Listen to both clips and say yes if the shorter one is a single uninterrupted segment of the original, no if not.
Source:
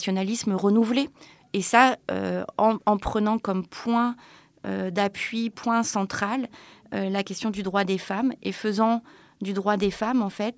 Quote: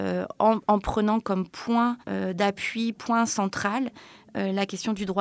no